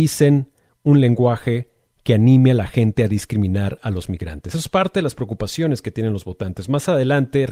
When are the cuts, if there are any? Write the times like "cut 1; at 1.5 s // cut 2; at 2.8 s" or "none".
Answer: none